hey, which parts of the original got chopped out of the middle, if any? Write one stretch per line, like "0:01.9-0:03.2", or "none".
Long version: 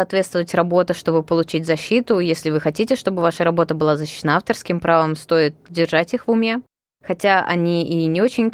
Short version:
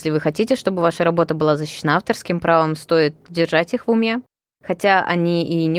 none